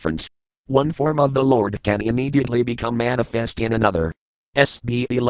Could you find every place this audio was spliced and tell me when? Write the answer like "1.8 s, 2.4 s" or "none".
none